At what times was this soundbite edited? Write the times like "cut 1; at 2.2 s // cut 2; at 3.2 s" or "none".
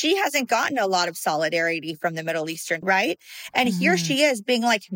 cut 1; at 2.8 s